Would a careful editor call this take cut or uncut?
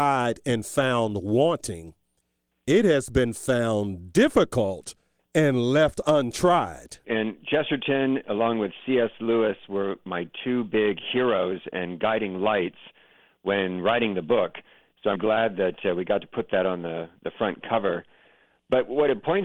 cut